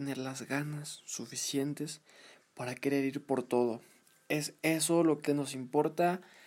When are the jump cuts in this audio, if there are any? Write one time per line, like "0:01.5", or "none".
0:05.3